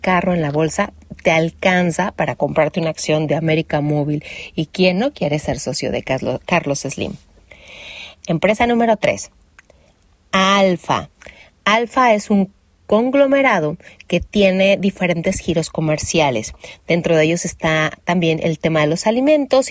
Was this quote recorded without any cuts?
yes; 0 cuts

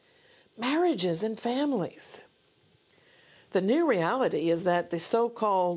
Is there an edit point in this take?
no; 0 cuts

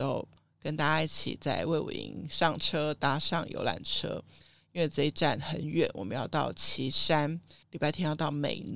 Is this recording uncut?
yes; 0 cuts

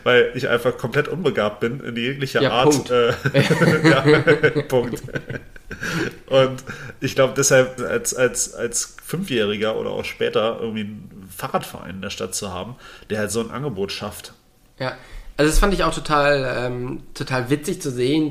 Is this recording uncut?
no; 1 cut; at 7.8 s

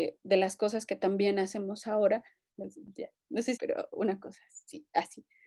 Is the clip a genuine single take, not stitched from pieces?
no; 2 cuts; at 2.5 s, 3.6 s

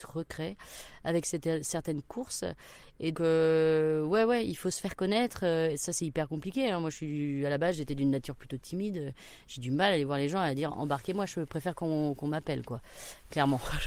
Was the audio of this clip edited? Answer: yes; 1 cut; at 3.1 s

